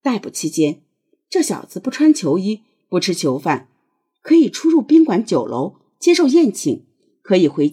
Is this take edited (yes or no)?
no